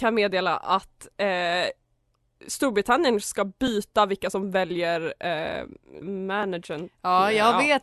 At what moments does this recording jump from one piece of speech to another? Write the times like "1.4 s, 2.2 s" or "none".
6.0 s